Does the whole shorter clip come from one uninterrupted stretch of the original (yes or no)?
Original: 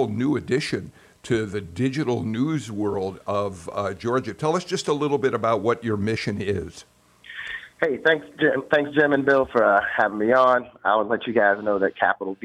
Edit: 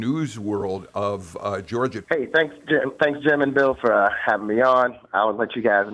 no